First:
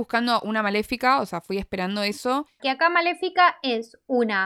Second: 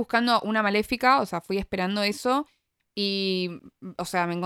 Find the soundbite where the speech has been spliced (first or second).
first